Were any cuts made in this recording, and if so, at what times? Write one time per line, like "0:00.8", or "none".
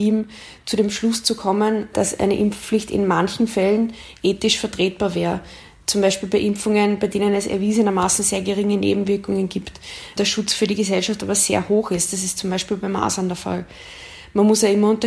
none